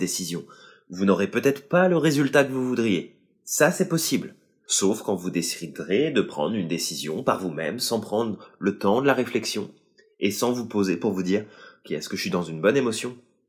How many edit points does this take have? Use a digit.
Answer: 1